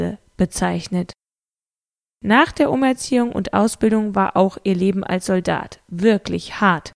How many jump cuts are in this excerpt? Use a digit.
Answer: 0